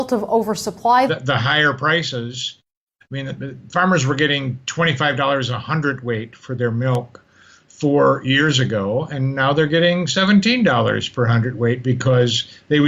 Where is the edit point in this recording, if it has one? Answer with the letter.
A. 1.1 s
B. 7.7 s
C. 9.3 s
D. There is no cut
A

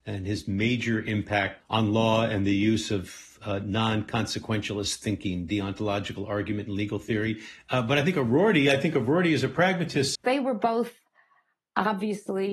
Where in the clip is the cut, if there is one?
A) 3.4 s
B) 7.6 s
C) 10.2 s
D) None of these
C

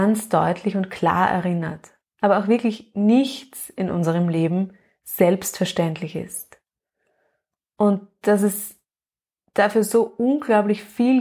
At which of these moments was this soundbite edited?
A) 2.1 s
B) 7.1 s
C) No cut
A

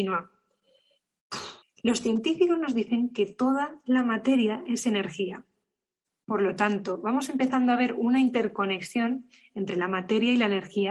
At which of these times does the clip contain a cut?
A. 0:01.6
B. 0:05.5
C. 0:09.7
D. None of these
A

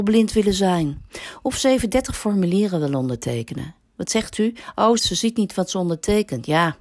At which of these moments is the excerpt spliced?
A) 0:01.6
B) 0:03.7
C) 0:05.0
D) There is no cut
C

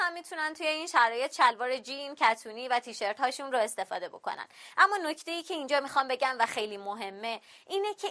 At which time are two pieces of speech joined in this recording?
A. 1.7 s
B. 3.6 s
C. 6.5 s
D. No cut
C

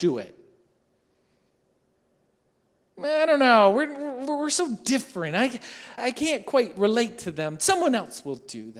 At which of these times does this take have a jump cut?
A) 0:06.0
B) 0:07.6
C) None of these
A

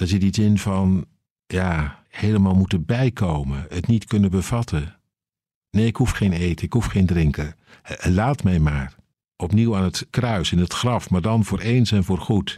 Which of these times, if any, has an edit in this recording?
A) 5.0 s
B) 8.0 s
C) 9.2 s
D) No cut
C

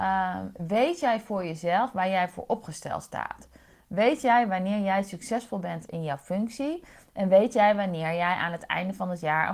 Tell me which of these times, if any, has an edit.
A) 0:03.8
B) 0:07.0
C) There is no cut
C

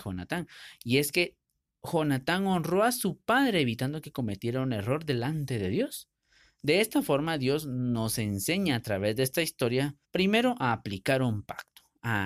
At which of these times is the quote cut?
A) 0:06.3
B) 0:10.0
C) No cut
B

